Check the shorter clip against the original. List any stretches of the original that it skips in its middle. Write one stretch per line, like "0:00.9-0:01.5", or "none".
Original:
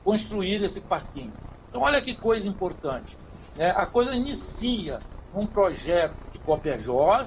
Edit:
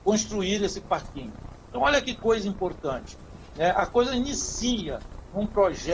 none